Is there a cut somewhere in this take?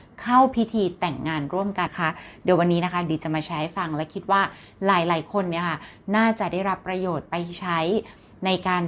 yes; 1 cut; at 1.9 s

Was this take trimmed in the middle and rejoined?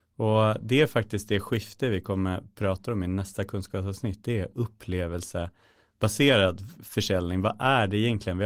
no; 0 cuts

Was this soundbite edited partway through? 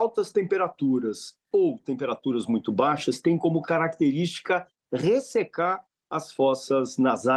no; 0 cuts

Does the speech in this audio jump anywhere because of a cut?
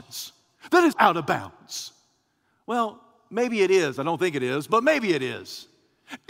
yes; 1 cut; at 0.9 s

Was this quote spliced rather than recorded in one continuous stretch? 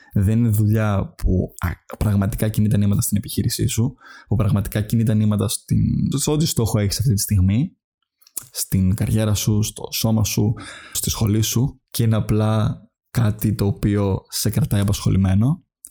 yes; 2 cuts; at 6.1 s, 10.9 s

